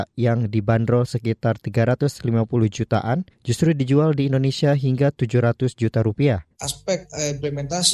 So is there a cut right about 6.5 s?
yes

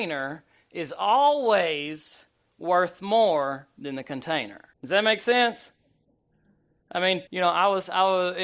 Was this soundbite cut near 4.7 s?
yes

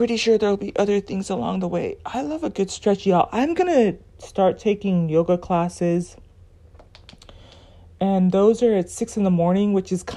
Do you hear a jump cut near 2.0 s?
no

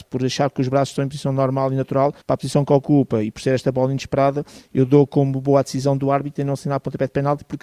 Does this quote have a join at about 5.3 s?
no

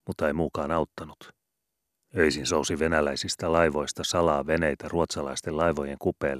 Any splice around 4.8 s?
no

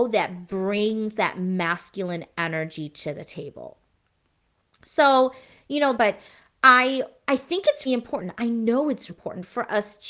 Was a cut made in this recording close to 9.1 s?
yes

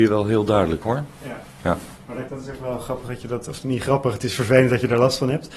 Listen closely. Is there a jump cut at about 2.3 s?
yes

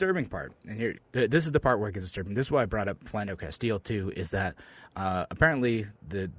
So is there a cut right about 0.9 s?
yes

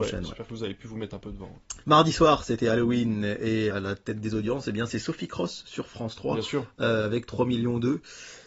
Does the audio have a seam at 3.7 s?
yes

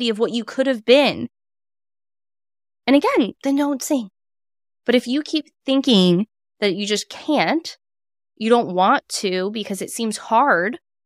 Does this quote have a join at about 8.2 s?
no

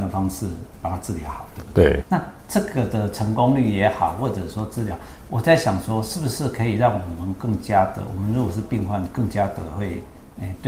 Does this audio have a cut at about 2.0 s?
yes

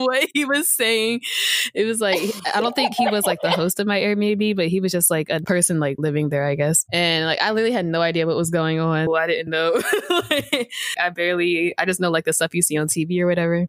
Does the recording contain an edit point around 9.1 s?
yes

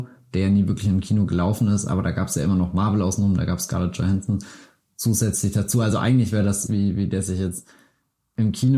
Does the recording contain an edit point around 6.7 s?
yes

